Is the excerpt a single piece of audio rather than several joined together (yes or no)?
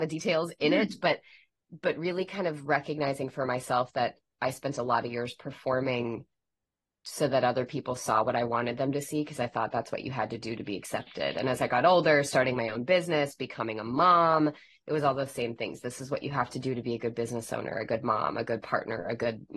yes